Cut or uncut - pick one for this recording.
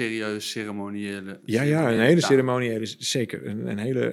uncut